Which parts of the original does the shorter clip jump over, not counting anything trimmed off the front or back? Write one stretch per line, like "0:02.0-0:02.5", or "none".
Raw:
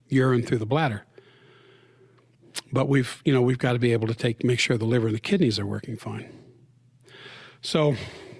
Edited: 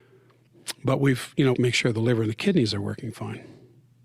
0:03.4-0:04.4